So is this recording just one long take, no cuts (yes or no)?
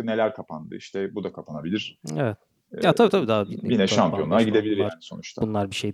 yes